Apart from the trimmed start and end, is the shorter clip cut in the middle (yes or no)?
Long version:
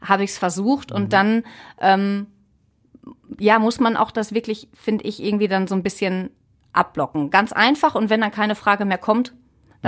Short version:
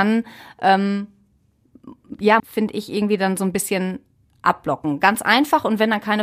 yes